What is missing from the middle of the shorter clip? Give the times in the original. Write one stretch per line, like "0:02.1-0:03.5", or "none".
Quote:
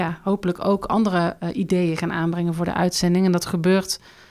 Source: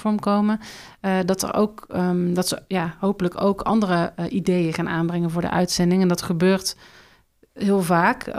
none